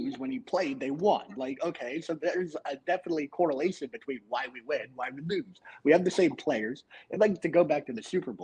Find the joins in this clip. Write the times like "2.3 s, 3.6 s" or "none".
none